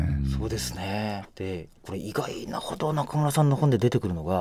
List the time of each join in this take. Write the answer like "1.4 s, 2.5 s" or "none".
1.2 s